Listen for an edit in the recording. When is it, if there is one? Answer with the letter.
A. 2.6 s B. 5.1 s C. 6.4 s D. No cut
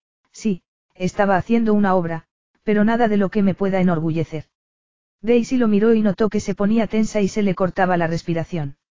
B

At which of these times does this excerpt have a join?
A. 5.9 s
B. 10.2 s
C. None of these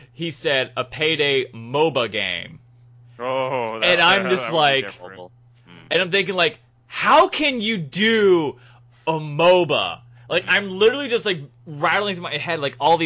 C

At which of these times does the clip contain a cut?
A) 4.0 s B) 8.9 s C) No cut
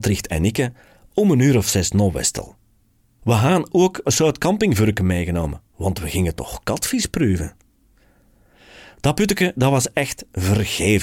A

